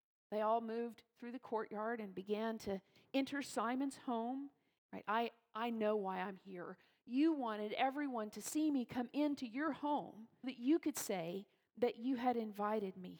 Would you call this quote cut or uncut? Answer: cut